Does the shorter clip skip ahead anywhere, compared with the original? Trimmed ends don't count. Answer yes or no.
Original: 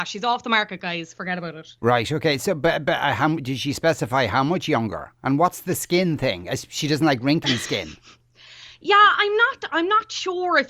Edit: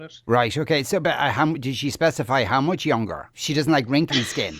yes